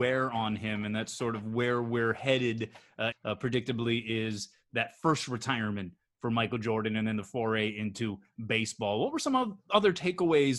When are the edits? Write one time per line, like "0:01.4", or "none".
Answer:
0:03.1